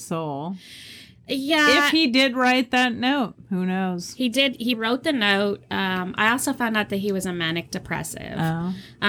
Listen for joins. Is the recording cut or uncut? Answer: uncut